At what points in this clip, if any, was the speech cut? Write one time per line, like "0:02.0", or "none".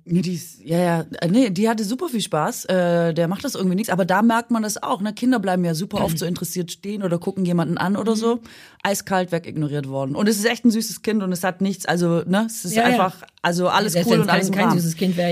none